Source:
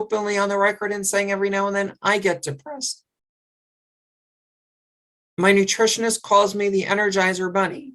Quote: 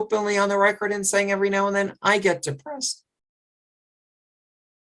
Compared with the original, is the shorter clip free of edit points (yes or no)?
yes